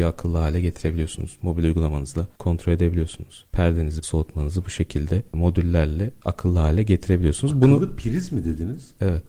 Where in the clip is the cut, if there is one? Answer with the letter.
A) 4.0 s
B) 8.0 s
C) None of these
A